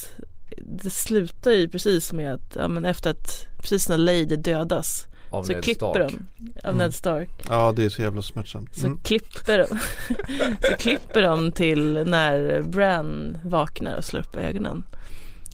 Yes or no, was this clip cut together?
no